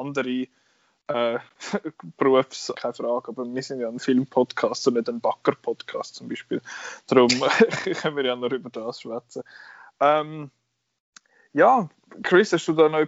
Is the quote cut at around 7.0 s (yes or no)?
no